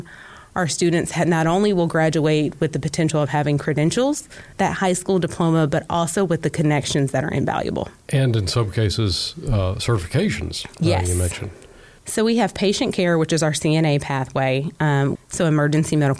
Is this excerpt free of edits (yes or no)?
no